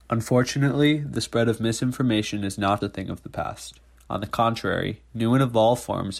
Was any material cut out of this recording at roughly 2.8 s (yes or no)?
yes